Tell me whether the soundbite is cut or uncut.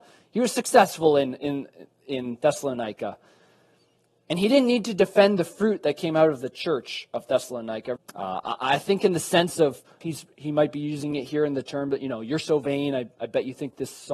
cut